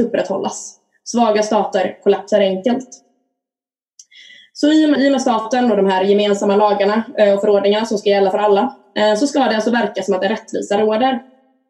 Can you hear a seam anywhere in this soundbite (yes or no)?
yes